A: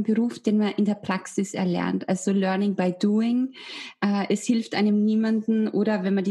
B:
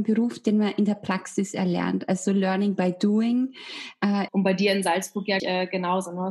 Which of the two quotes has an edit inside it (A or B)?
B